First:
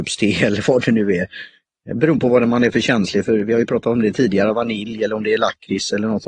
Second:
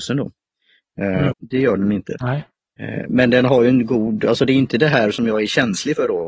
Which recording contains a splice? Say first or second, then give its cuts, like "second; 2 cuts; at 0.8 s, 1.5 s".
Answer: second; 1 cut; at 1.3 s